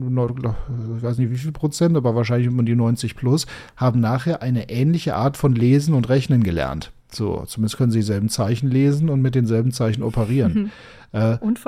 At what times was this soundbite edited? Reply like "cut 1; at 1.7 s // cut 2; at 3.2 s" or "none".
cut 1; at 7.0 s